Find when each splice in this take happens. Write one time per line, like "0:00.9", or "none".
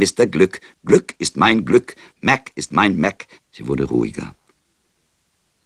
0:03.4